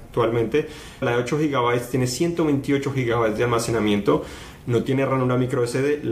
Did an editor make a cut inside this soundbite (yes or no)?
yes